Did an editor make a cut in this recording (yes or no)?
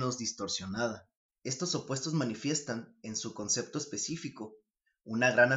yes